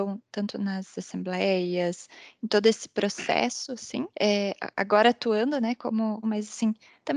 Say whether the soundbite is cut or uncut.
cut